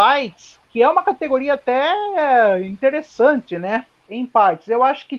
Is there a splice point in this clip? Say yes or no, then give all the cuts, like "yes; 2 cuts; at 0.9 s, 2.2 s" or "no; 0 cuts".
yes; 1 cut; at 4.1 s